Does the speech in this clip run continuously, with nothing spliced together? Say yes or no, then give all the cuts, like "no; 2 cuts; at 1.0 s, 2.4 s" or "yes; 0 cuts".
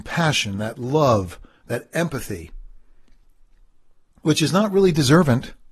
yes; 0 cuts